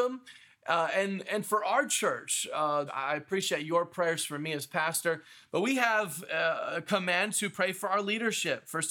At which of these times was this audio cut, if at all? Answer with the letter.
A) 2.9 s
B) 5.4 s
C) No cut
A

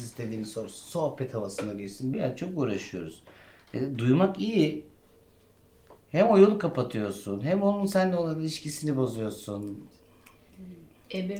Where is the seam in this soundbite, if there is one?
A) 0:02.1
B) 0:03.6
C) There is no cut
A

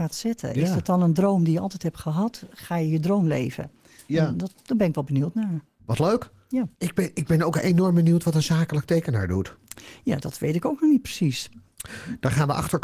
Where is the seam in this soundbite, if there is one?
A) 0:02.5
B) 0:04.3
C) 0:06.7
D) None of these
C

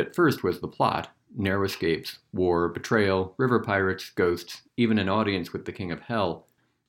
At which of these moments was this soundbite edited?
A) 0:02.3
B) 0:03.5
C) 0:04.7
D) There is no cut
D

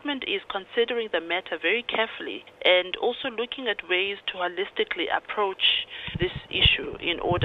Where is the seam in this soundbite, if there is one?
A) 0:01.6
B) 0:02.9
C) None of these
C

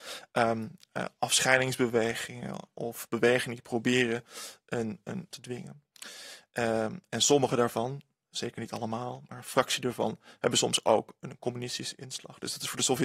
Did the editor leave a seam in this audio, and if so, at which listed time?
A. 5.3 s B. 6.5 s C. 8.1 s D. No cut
A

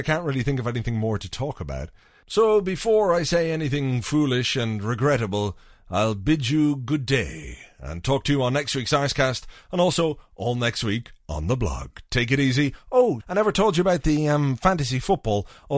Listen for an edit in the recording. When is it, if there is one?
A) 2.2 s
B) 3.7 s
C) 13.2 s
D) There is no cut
C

